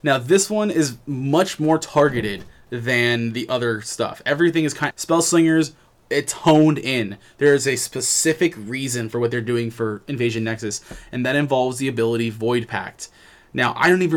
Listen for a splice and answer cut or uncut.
cut